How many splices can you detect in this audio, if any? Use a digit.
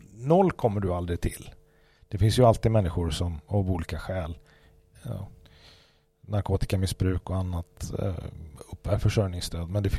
0